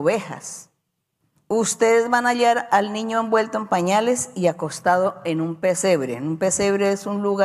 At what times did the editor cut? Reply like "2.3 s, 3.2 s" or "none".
1.4 s